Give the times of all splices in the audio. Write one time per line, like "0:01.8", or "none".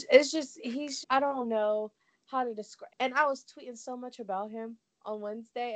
0:01.0
0:02.9